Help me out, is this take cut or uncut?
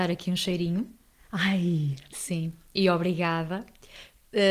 cut